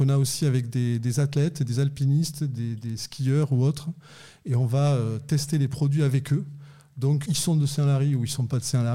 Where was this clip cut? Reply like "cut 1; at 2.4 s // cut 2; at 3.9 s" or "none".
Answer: cut 1; at 7.2 s